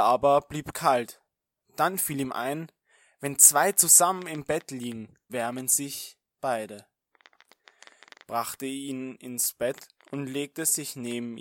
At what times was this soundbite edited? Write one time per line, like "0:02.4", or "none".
0:05.3

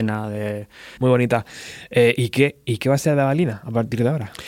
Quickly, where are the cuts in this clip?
0:01.0

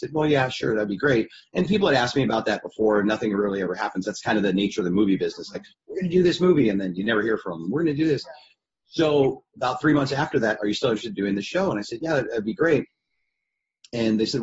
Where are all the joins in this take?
0:10.6

